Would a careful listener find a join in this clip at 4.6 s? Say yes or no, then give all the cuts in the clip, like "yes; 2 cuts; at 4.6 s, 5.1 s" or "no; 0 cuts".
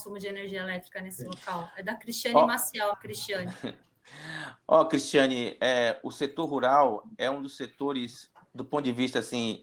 no; 1 cut; at 2.9 s